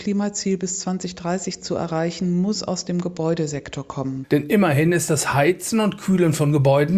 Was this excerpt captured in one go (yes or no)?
yes